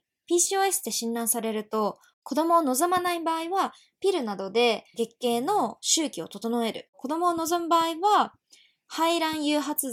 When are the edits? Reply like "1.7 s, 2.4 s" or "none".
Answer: 4.9 s